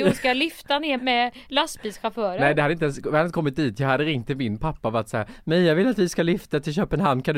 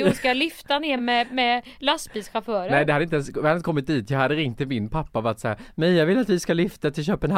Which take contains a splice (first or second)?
first